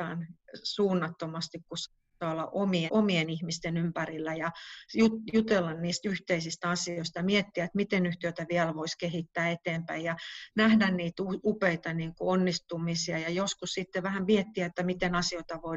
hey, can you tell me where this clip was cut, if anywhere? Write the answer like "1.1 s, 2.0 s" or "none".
2.9 s